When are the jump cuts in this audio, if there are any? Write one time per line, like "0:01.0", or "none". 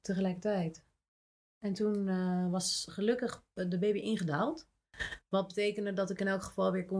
none